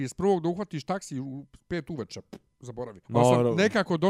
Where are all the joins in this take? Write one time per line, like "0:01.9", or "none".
0:03.0